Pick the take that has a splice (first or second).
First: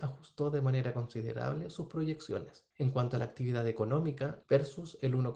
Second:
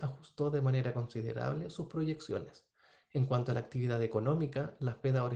first